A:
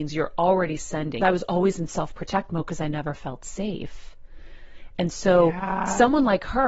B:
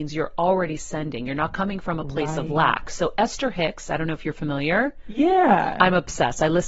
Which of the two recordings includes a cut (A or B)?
A